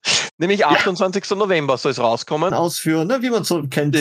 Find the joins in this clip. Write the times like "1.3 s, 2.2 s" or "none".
2.5 s